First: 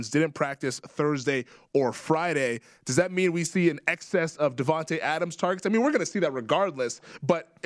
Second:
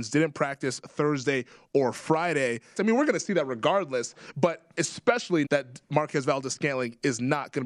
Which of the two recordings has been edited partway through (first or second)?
second